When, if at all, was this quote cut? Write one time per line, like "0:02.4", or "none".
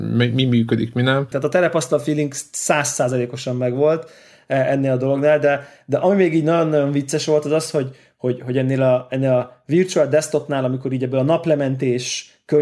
0:01.3